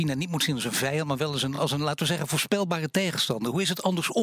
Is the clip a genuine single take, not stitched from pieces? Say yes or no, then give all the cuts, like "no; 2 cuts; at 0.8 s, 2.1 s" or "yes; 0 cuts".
yes; 0 cuts